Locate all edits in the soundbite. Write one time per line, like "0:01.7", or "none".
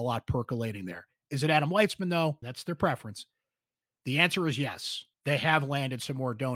0:02.4
0:05.1